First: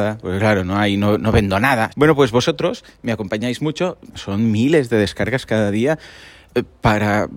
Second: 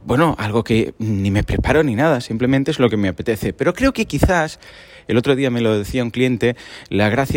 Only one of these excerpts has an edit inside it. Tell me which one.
first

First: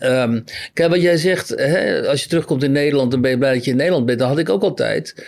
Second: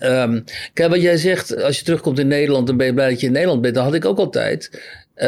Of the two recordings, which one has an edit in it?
second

